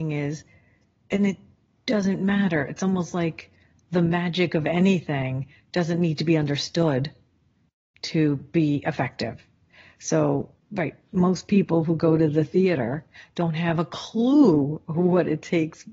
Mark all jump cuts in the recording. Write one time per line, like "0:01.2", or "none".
none